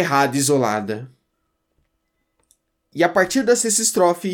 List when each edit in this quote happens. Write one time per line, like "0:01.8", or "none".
none